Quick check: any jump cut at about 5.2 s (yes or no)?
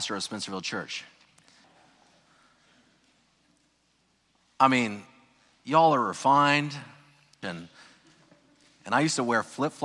no